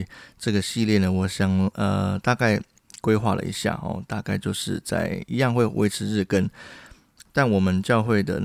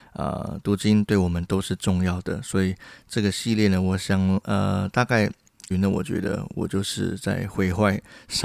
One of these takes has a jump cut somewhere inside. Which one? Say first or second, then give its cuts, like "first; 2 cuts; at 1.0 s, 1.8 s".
second; 1 cut; at 5.7 s